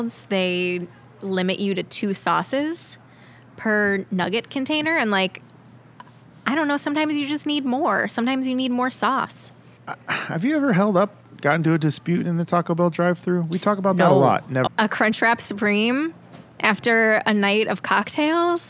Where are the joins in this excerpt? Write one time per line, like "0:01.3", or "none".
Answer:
0:14.7